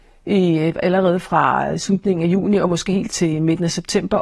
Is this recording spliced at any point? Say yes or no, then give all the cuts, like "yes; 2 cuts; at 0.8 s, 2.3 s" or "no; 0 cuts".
yes; 1 cut; at 3.1 s